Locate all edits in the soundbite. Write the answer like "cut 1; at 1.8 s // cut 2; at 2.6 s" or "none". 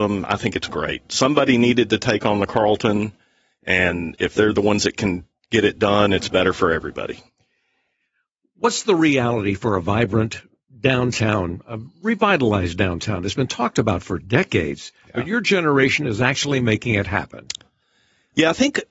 none